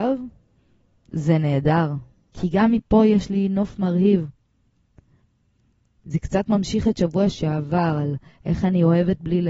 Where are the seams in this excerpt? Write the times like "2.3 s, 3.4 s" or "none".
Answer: 2.3 s, 6.0 s

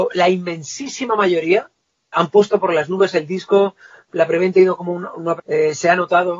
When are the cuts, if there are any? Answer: 2.1 s, 5.4 s

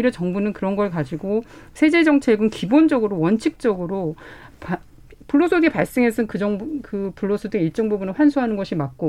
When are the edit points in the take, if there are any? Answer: none

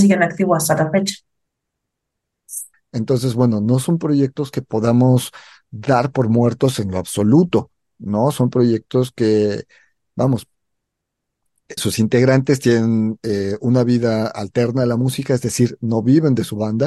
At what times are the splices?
2.7 s, 11.8 s

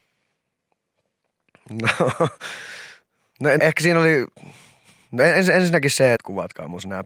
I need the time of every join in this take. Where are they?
3.6 s, 6.2 s

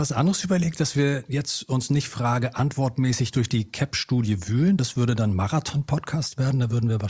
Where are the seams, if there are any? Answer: none

